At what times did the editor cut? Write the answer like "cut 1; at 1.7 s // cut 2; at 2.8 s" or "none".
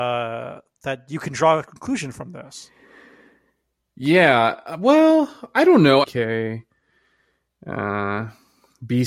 cut 1; at 6.0 s